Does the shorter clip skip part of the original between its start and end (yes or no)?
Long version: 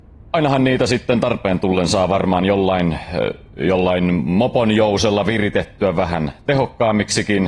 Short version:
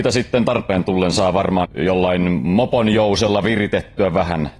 yes